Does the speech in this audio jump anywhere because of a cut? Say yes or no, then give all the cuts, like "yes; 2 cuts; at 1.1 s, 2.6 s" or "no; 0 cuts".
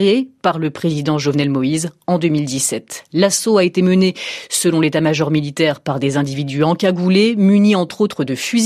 no; 0 cuts